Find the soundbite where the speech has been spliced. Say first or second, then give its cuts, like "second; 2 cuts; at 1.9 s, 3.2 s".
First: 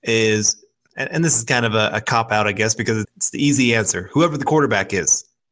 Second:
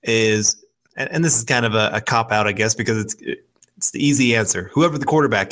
first; 1 cut; at 3.0 s